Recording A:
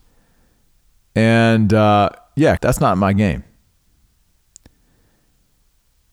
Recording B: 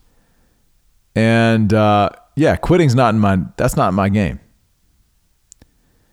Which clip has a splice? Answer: A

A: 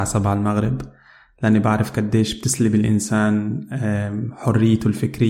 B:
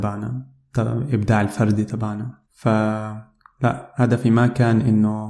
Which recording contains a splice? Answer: B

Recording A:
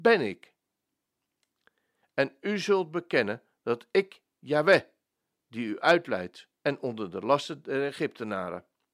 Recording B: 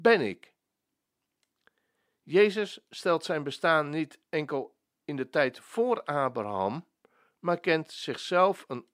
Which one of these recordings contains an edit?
A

